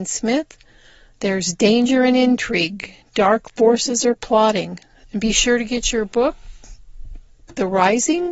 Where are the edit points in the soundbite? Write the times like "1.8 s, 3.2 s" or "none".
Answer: 1.1 s, 5.0 s